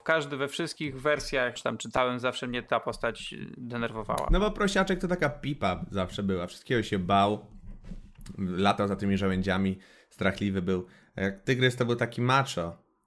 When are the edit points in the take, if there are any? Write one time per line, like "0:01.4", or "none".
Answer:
0:01.6